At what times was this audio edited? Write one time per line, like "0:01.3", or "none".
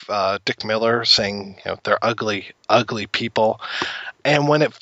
0:02.6